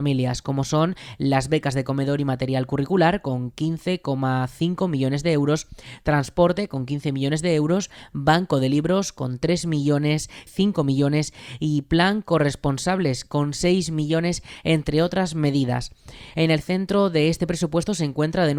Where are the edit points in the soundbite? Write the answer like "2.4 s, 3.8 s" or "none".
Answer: 10.5 s, 16.3 s